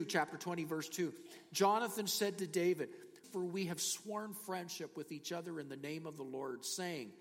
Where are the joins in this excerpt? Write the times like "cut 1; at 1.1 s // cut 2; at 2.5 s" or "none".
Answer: cut 1; at 3.2 s

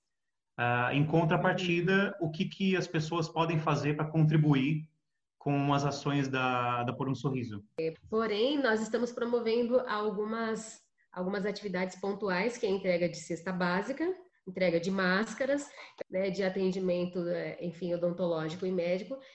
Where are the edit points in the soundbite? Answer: cut 1; at 7.9 s // cut 2; at 16.0 s

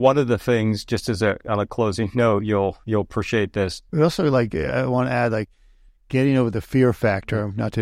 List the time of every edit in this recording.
cut 1; at 3.9 s

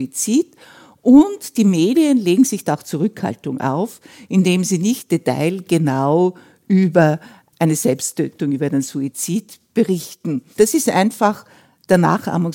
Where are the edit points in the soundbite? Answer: cut 1; at 10.6 s

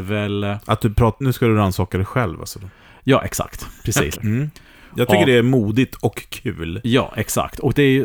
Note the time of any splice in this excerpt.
cut 1; at 1.2 s // cut 2; at 4.2 s

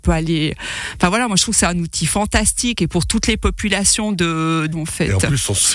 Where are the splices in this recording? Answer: cut 1; at 4.7 s

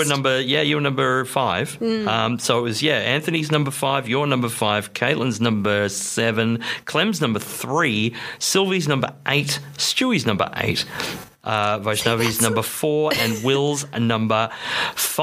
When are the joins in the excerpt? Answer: none

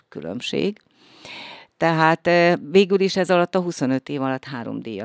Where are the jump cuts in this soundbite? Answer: none

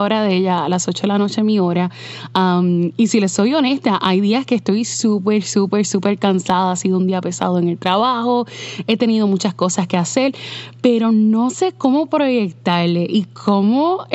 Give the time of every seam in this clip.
none

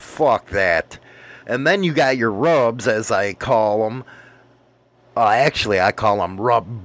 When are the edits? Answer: cut 1; at 1.4 s

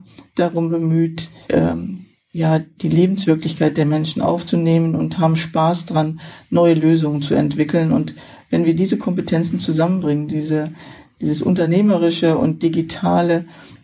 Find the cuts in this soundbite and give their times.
cut 1; at 1.4 s

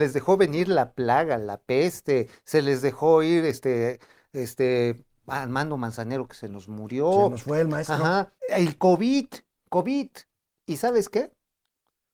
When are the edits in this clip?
cut 1; at 8.4 s

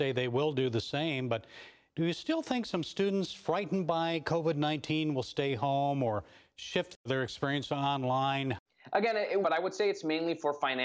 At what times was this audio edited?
cut 1; at 9.4 s

